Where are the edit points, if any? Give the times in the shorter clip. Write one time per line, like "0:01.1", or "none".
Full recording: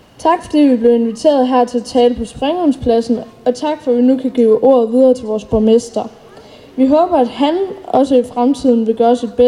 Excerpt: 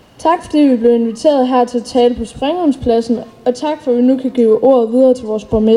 none